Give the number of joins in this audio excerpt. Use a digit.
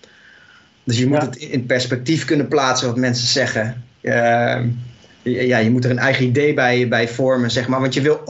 0